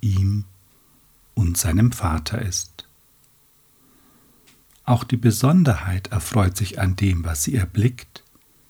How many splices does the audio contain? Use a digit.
0